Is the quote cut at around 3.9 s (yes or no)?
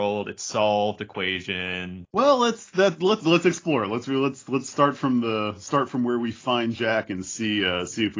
no